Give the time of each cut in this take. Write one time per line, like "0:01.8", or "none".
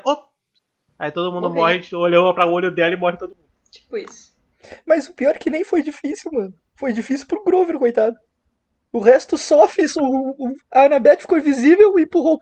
0:10.6